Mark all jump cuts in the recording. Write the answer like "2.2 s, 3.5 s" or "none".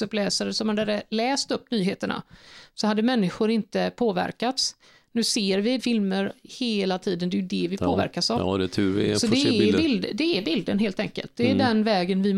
5.8 s